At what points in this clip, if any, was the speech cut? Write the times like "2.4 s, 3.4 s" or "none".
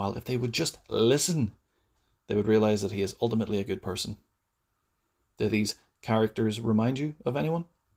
none